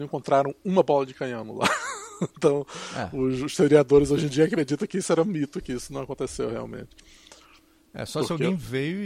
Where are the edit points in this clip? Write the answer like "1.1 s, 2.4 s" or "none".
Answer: none